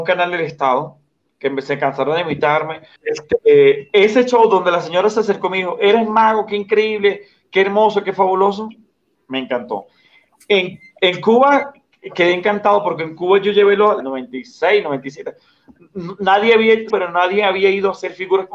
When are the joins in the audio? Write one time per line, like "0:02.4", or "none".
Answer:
0:03.0
0:14.0
0:16.9